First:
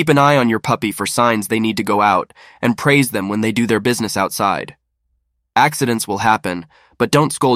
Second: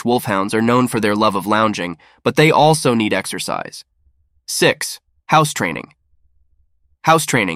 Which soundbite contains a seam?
second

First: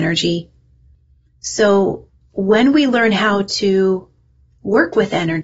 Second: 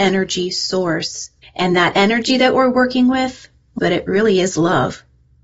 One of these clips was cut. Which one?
second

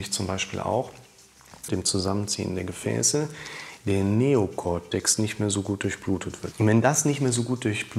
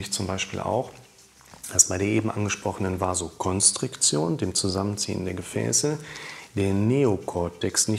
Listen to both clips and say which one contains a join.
first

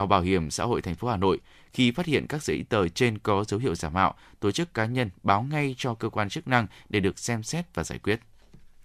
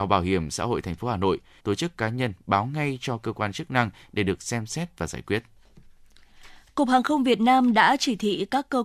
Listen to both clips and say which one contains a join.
second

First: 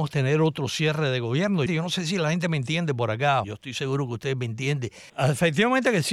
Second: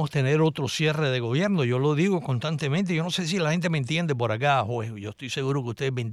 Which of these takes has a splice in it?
first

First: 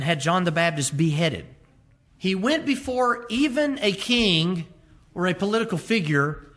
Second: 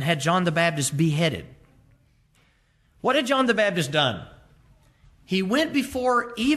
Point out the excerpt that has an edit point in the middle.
first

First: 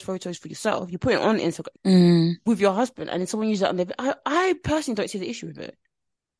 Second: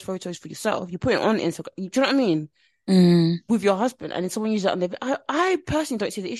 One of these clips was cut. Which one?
first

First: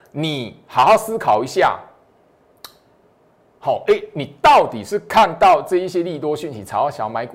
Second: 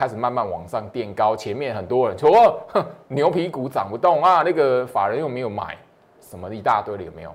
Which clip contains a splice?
second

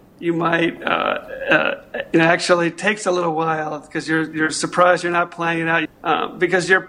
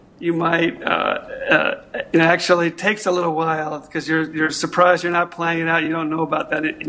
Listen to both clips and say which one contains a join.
first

